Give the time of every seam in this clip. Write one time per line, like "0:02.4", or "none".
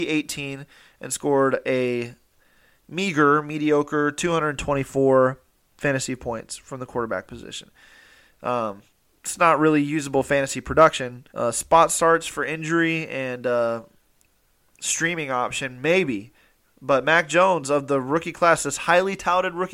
0:11.3